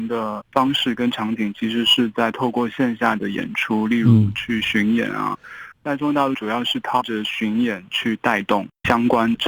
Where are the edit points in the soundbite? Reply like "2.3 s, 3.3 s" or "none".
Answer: none